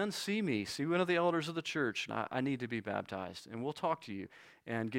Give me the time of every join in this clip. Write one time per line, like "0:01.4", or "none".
0:02.1